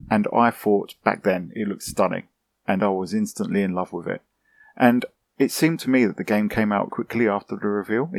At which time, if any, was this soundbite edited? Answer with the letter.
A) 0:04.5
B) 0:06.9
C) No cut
B